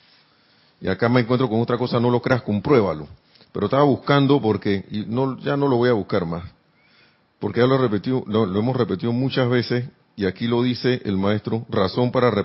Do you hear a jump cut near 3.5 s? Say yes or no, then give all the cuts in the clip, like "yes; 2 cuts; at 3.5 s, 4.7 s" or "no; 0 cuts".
no; 0 cuts